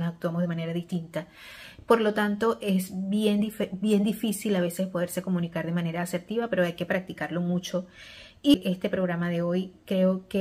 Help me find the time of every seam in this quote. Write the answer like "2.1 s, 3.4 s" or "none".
none